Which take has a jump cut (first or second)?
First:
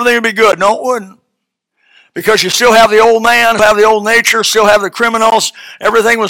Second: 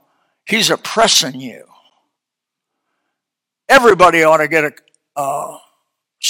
first